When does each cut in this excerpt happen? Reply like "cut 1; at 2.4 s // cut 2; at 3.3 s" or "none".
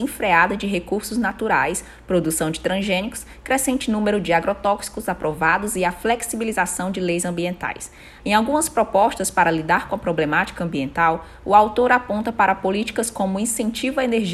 cut 1; at 8.2 s